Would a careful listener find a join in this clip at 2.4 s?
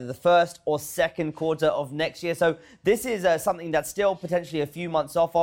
no; 0 cuts

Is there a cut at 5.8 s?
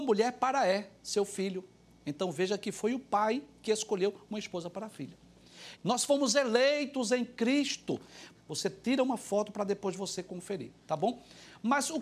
yes; 2 cuts; at 5.8 s, 8.4 s

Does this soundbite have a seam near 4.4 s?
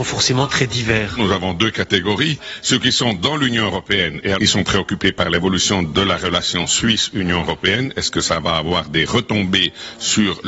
yes; 1 cut; at 4.4 s

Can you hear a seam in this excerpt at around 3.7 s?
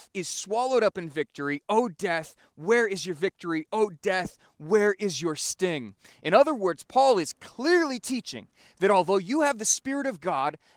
no; 0 cuts

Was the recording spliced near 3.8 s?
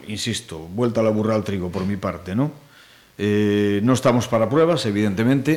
no; 0 cuts

